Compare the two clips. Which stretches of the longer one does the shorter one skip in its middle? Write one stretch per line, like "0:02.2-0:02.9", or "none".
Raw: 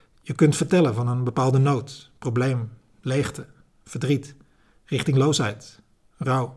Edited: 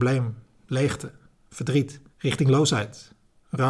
0:04.4-0:04.8